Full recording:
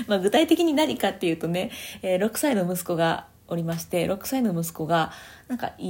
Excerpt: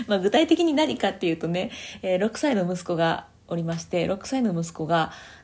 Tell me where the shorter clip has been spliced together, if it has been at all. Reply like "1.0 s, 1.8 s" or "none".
none